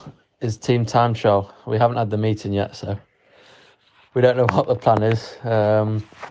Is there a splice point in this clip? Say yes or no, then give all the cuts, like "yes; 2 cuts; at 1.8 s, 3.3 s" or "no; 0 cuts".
no; 0 cuts